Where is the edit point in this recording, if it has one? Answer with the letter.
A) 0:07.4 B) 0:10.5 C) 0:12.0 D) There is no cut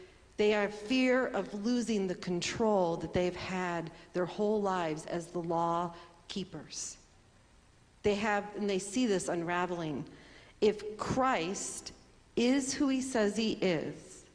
D